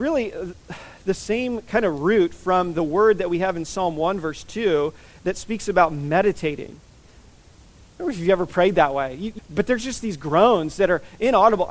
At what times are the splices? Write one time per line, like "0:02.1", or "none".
0:07.2
0:09.4